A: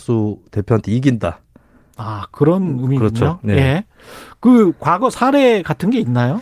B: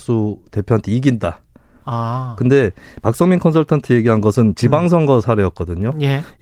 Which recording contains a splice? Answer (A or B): B